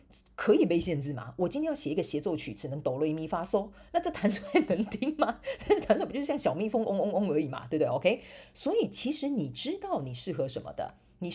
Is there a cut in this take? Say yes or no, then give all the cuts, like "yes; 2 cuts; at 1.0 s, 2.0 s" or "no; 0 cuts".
no; 0 cuts